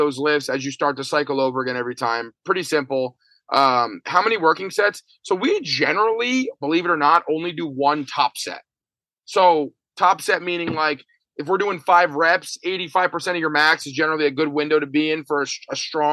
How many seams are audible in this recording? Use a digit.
0